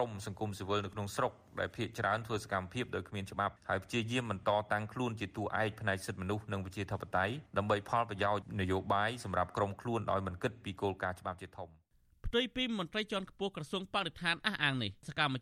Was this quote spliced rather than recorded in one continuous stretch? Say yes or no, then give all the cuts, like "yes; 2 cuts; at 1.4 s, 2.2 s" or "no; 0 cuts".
no; 0 cuts